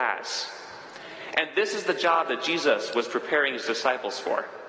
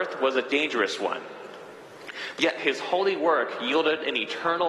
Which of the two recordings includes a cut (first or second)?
second